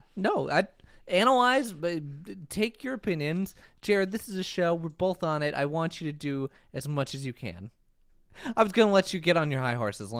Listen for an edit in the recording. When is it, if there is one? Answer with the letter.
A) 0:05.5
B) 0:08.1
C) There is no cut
B